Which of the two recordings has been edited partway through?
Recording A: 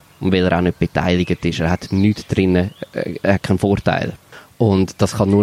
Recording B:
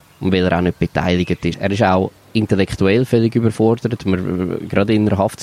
B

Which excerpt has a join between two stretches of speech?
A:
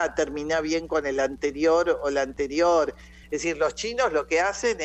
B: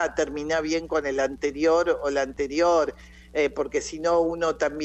A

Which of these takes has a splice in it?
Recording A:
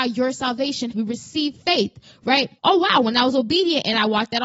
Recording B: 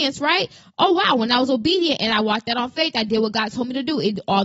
A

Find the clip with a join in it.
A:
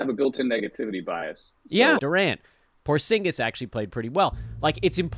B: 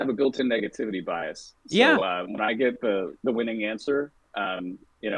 A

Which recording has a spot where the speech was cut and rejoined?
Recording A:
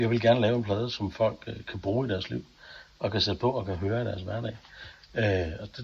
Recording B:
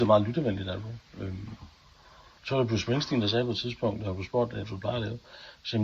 B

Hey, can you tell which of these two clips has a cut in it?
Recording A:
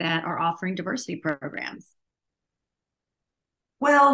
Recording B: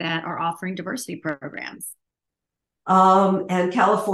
B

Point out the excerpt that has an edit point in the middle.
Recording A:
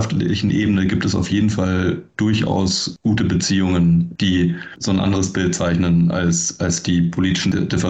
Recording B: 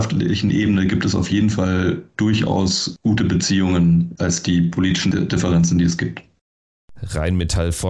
B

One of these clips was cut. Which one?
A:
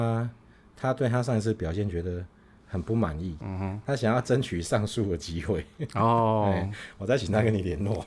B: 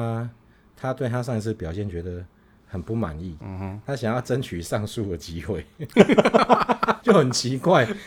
B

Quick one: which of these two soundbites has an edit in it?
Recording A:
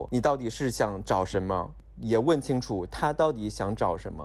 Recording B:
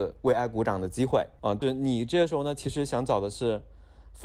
B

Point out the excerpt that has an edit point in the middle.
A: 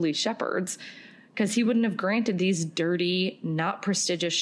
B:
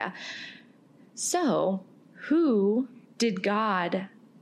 B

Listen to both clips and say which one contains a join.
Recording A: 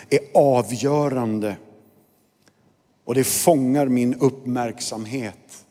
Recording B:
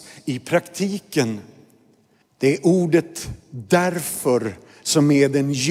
B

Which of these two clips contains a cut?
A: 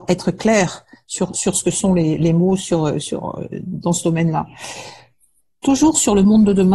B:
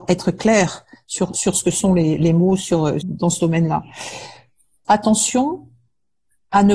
B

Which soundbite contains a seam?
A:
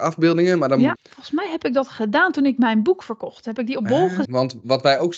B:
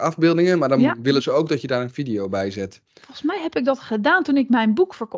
A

